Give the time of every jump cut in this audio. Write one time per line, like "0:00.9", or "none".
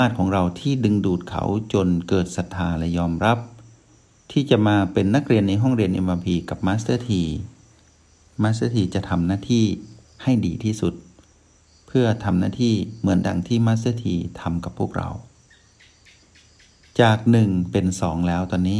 none